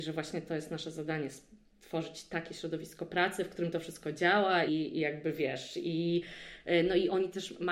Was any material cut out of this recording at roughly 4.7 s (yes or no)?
yes